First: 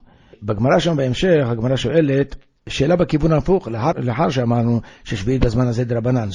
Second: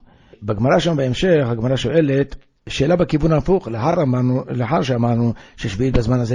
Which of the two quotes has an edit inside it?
first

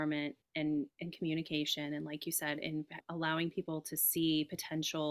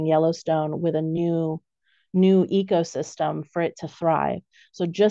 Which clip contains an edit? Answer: first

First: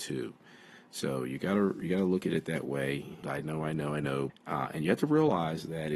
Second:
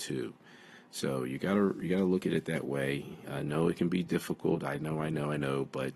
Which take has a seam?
first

